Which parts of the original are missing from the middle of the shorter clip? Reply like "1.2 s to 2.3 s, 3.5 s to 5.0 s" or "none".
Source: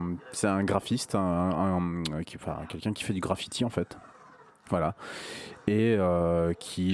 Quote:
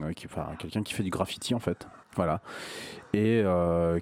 4.1 s to 4.6 s